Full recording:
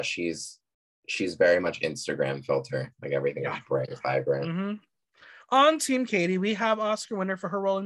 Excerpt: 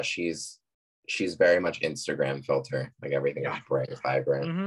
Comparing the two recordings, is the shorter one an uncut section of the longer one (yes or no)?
yes